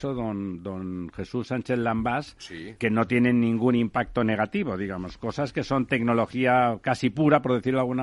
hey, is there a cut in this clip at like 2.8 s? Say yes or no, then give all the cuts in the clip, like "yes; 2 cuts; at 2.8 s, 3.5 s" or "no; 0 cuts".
yes; 1 cut; at 2.8 s